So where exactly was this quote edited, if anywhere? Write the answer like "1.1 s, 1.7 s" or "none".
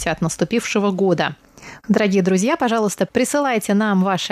1.8 s